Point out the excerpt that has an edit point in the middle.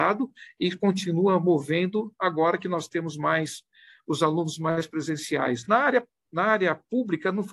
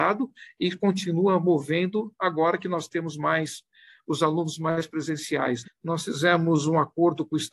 second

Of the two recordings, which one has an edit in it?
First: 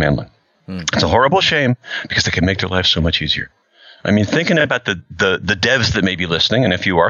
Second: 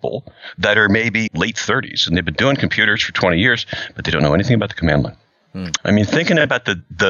second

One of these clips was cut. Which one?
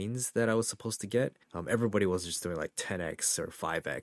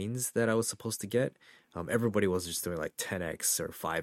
first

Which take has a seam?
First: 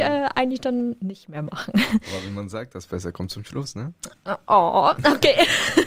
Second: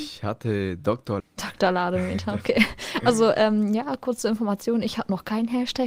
second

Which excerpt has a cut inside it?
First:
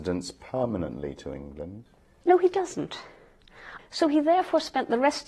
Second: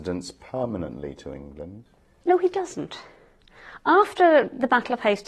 first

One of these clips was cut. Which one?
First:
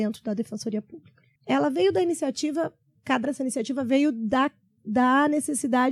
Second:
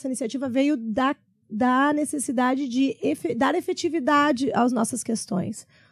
first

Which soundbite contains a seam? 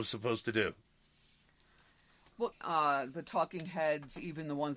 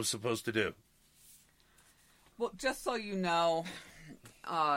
first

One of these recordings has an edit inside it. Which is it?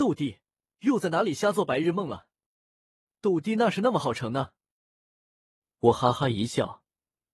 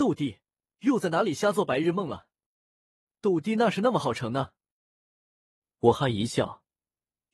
second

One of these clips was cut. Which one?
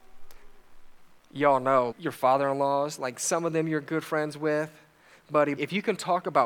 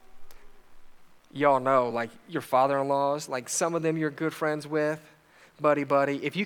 first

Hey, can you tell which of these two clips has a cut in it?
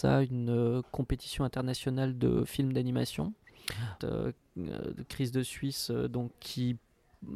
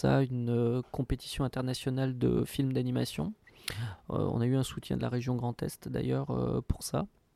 first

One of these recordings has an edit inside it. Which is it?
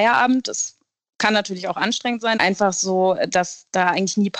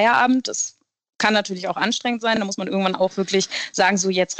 first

